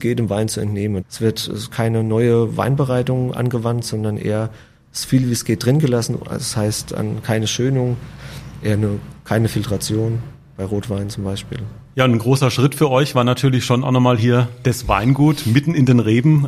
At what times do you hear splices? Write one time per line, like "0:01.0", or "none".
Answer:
0:01.0